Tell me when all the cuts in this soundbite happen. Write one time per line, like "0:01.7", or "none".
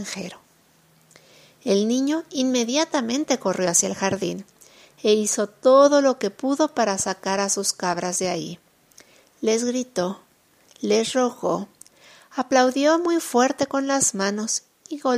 none